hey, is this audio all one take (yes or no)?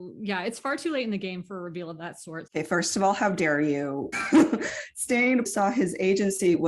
no